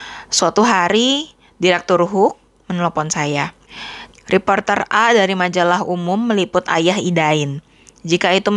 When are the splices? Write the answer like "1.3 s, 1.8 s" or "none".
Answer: 4.1 s